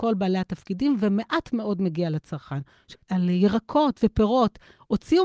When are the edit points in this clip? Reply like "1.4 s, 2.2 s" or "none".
3.0 s

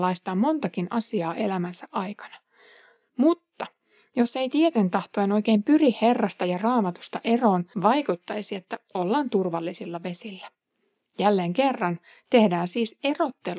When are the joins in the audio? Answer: 7.7 s

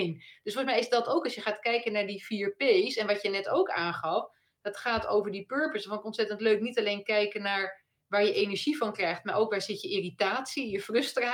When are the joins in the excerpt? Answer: none

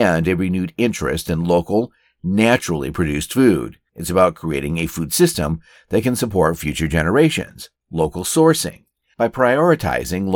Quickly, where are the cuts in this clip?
3.9 s, 7.8 s

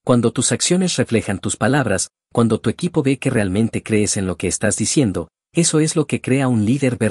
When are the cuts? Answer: none

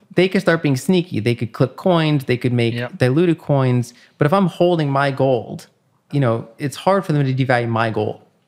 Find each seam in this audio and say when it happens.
6.1 s

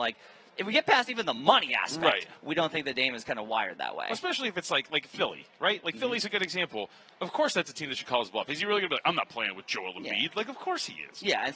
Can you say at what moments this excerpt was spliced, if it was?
none

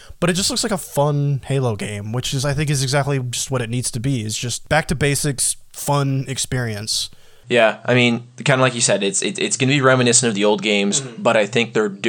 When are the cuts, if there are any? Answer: none

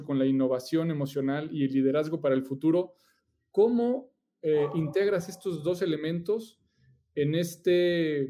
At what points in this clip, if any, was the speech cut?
none

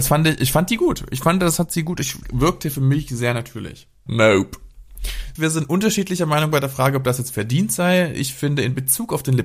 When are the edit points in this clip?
4.1 s, 5.4 s

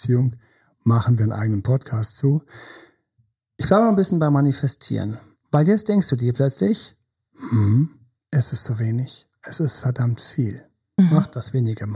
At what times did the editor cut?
8.2 s

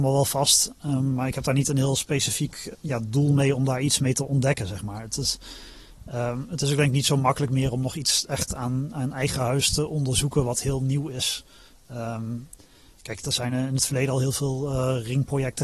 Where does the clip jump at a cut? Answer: 2.7 s

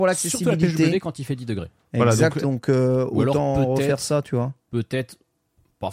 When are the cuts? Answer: 2.4 s

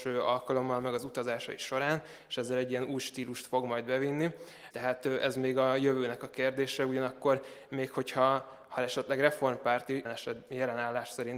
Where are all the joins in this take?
4.7 s, 10.0 s

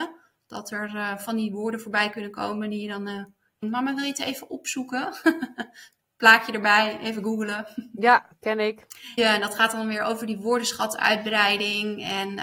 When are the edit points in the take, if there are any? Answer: 3.6 s, 9.2 s

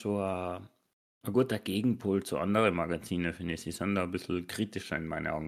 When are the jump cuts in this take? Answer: none

